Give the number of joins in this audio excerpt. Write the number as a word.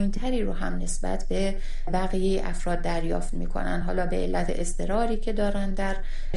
zero